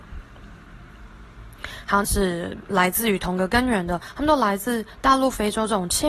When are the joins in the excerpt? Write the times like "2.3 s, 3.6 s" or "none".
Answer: 2.0 s